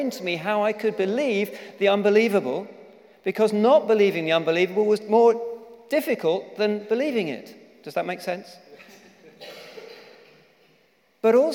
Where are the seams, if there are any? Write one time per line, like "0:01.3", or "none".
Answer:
none